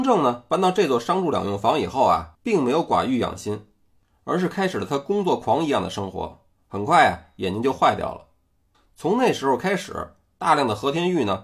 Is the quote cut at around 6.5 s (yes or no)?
yes